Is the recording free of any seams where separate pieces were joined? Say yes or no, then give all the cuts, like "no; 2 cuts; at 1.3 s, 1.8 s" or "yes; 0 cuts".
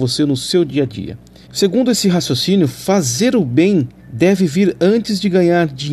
no; 2 cuts; at 1.4 s, 4.0 s